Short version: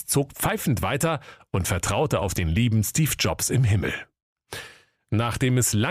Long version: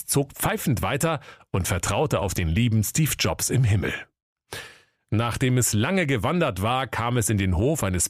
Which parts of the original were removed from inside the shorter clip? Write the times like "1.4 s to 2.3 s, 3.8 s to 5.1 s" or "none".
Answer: none